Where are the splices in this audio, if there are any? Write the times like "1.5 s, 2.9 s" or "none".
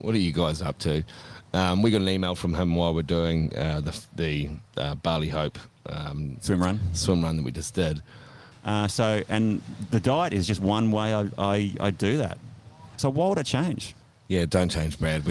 8.5 s, 13.0 s